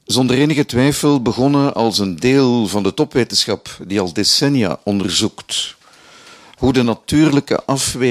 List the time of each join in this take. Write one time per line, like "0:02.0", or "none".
none